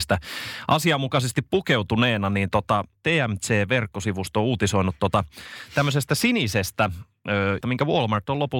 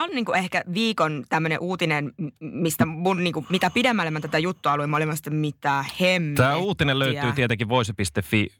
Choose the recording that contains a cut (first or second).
first